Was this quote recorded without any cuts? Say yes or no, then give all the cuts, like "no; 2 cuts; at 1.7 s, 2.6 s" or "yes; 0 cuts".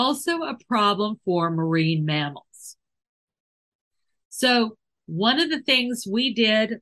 yes; 0 cuts